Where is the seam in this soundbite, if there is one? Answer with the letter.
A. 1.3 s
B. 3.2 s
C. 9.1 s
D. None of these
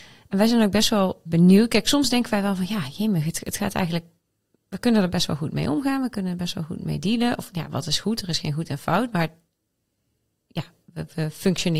A